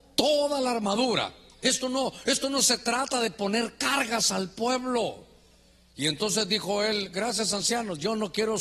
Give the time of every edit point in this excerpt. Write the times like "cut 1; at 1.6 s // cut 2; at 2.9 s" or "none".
cut 1; at 1.6 s